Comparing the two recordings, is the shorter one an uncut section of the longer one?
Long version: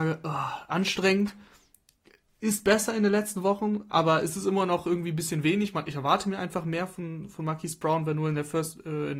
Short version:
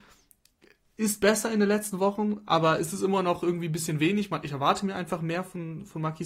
yes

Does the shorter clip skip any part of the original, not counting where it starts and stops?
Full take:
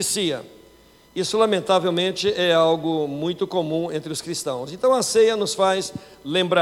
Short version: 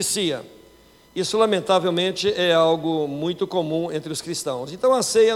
no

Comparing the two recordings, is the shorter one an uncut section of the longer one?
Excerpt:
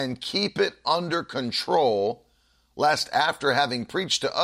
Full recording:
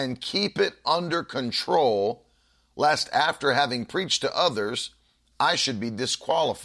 yes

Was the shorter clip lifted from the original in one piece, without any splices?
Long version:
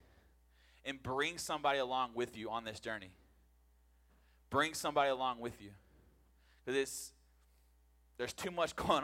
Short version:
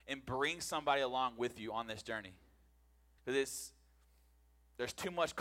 no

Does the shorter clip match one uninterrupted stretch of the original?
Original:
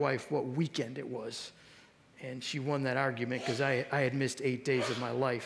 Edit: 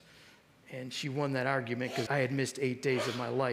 no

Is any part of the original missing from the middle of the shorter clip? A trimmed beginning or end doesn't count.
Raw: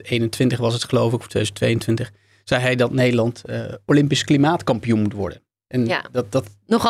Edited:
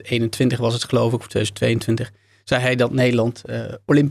no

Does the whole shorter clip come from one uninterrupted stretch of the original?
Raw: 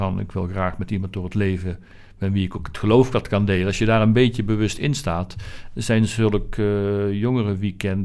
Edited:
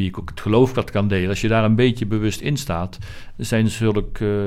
yes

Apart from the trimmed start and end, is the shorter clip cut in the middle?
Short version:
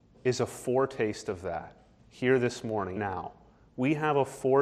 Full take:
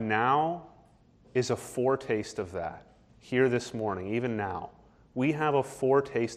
yes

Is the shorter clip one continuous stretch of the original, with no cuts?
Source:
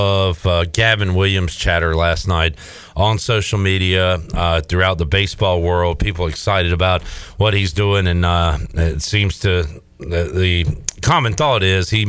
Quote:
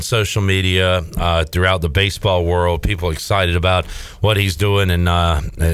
yes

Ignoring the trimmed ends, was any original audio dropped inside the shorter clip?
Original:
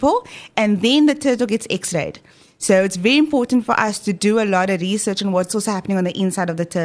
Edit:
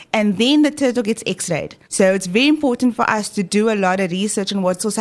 yes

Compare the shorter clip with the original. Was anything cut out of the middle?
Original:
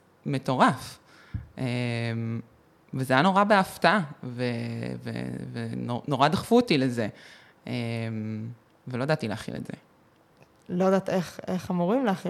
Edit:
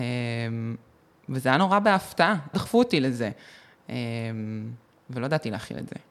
yes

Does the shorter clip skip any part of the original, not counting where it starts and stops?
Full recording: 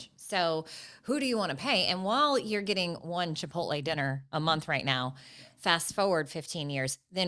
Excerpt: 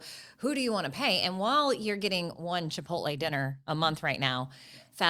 no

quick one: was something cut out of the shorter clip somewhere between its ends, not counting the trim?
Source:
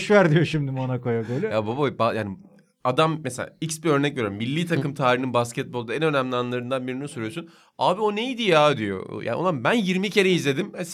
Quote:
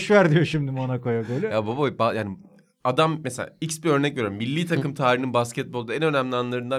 no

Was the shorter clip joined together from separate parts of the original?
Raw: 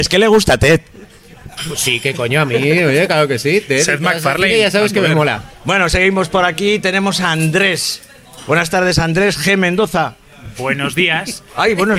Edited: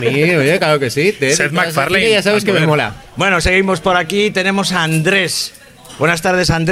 no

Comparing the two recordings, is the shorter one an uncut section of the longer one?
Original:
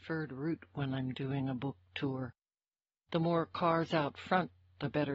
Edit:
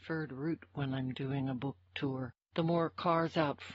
no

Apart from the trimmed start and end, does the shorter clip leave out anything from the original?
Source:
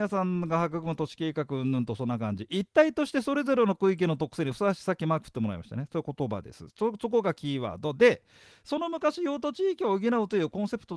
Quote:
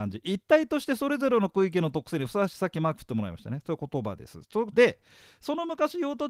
yes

